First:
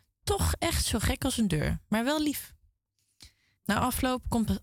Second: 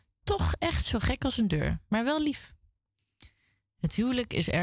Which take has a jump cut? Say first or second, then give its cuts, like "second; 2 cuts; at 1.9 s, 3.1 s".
first; 1 cut; at 3.6 s